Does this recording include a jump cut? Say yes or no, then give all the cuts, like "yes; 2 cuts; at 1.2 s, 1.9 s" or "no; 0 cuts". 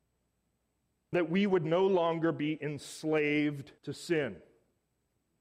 yes; 2 cuts; at 1.1 s, 3.8 s